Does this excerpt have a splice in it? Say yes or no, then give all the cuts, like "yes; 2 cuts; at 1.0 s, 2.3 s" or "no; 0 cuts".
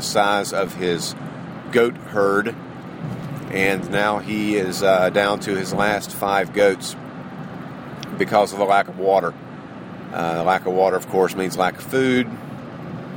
no; 0 cuts